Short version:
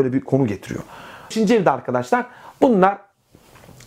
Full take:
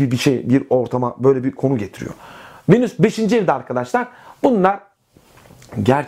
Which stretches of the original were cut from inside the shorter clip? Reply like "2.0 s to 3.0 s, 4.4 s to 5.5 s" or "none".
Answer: 2.6 s to 3.1 s